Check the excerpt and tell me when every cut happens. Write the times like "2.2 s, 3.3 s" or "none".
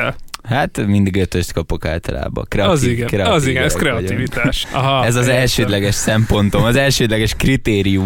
4.6 s